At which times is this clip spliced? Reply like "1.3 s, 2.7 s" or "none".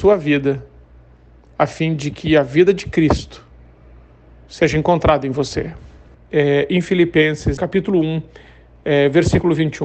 6.1 s, 7.6 s